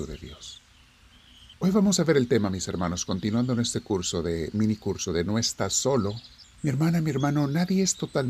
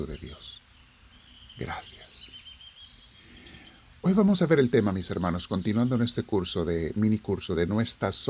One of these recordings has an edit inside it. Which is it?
first; 2 cuts; at 1.5 s, 6.4 s

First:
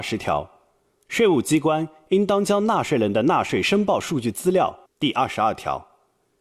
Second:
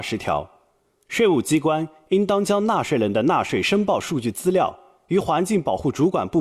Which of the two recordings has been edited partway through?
first; 1 cut; at 4.8 s

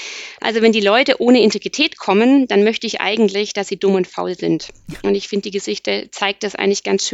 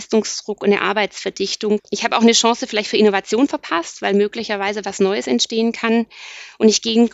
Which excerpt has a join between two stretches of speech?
second; 1 cut; at 1.8 s

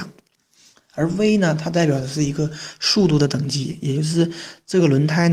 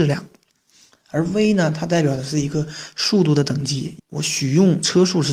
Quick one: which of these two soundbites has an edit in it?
second; 1 cut; at 4.0 s

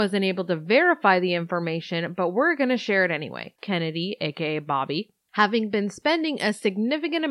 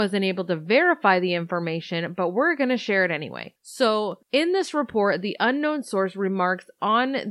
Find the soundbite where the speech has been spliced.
first; 1 cut; at 3.6 s

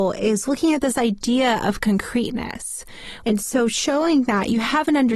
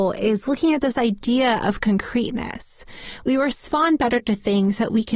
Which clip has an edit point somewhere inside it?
first; 1 cut; at 3.2 s

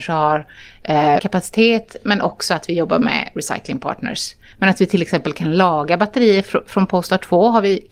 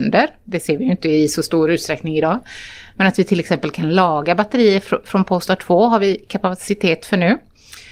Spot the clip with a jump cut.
first; 2 cuts; at 1.2 s, 4.5 s

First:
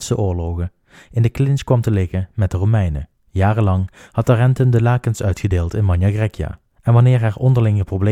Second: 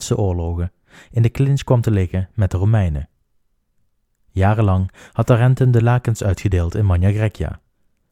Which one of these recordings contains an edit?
first; 2 cuts; at 3.2 s, 6.7 s

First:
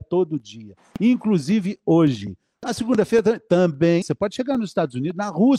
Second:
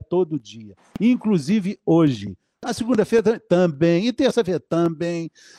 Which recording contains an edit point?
first; 1 cut; at 4.0 s

